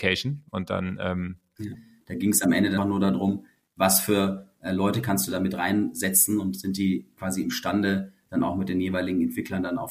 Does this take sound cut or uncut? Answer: cut